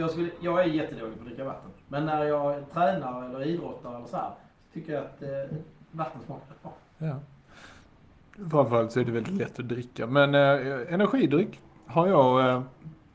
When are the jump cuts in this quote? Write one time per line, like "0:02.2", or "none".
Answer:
0:01.8